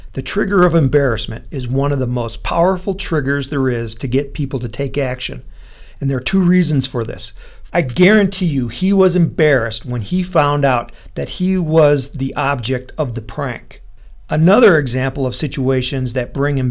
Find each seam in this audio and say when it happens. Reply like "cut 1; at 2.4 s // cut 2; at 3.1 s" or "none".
cut 1; at 7.7 s